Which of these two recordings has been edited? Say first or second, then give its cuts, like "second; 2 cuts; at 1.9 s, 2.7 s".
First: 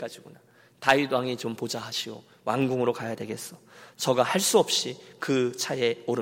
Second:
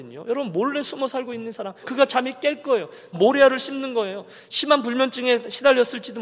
second; 2 cuts; at 1.8 s, 3.1 s